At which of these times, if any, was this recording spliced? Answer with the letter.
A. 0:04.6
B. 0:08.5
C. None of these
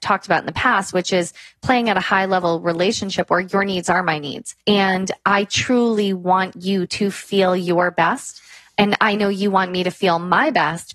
A